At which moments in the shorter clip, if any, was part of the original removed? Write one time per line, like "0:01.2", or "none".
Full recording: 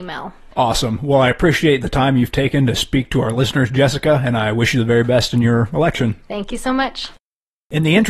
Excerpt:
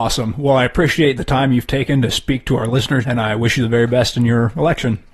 0:03.0